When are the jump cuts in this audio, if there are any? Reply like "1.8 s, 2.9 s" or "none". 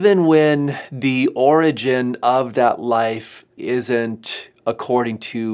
3.6 s